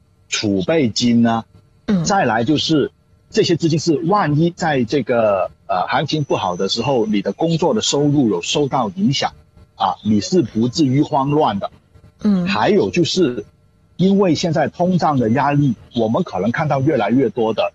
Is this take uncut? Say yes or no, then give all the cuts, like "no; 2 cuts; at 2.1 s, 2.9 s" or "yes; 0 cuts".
yes; 0 cuts